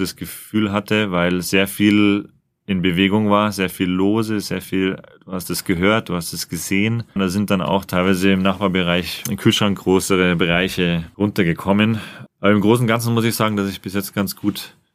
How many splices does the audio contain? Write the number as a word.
two